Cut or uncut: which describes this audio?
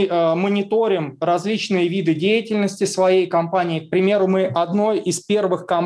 uncut